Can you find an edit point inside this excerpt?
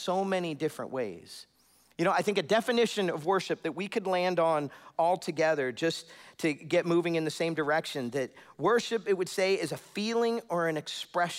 no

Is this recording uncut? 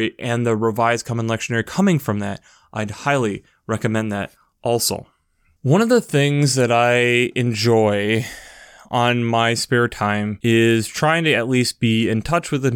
yes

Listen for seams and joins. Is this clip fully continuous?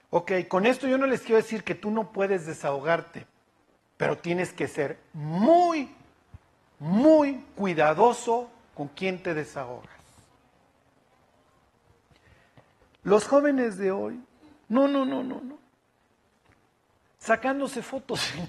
yes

